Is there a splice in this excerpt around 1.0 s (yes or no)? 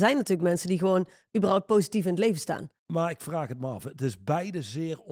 no